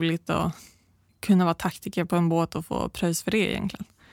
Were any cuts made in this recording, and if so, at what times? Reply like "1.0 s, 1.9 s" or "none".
none